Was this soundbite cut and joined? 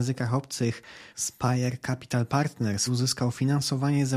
yes; 2 cuts; at 1.1 s, 2.9 s

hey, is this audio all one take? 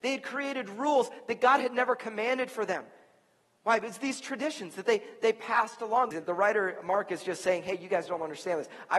no; 1 cut; at 6.1 s

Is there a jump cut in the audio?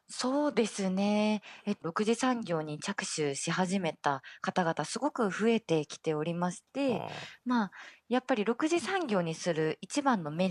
yes; 1 cut; at 1.8 s

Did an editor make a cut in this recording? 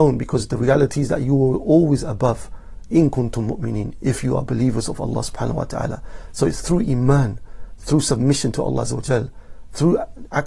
no; 0 cuts

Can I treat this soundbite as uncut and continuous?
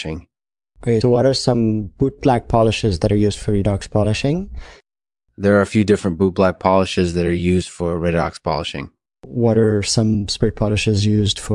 no; 2 cuts; at 1.0 s, 9.1 s

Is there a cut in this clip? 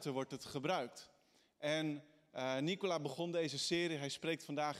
no; 0 cuts

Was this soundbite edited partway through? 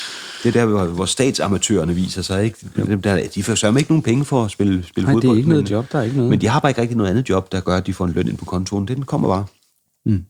no; 0 cuts

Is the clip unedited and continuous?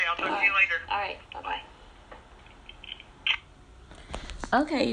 no; 1 cut; at 1.3 s

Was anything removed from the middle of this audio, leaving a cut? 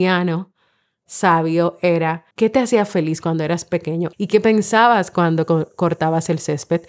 yes; 2 cuts; at 2.3 s, 4.1 s

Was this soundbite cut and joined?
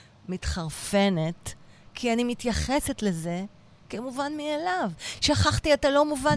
no; 0 cuts

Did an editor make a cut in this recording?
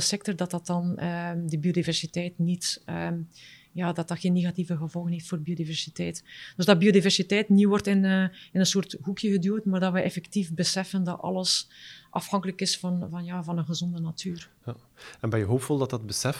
no; 0 cuts

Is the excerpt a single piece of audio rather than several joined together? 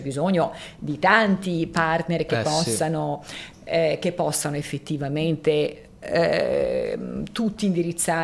yes; 0 cuts

